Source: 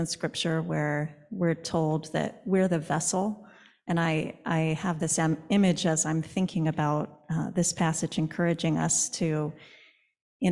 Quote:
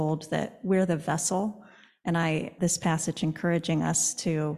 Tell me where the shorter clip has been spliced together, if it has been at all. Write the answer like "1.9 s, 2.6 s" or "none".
2.6 s